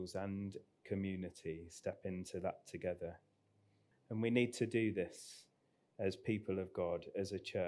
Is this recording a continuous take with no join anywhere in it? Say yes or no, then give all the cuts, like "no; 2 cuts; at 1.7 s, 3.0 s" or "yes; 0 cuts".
no; 1 cut; at 3.9 s